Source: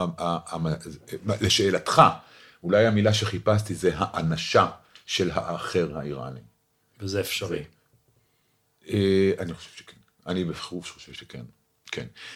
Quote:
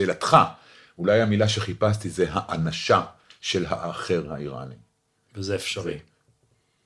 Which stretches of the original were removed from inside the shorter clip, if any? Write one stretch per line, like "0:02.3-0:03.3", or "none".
none